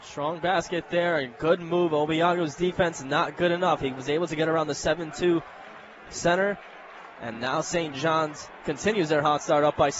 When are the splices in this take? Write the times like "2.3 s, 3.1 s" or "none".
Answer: none